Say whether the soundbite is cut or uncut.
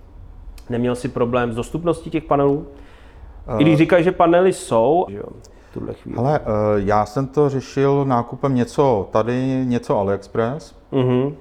cut